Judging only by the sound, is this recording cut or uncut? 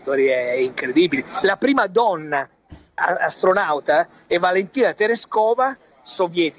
cut